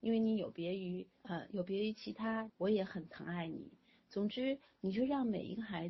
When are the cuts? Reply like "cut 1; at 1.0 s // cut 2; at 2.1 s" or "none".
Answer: cut 1; at 1.2 s // cut 2; at 2.5 s